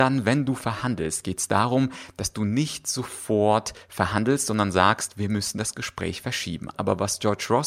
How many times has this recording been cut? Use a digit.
1